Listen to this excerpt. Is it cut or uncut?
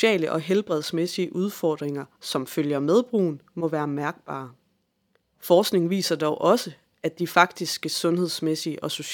cut